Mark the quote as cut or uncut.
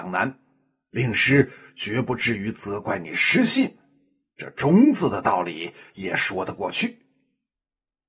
uncut